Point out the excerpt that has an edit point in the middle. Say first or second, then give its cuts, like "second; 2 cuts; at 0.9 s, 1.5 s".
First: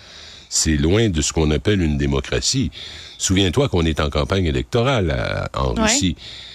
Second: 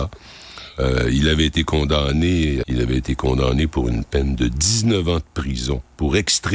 second; 1 cut; at 2.6 s